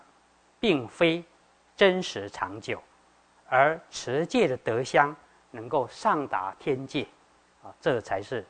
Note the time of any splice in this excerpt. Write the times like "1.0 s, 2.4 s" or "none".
none